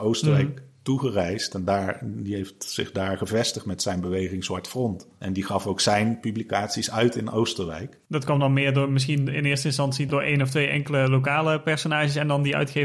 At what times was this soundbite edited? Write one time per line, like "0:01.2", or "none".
0:08.0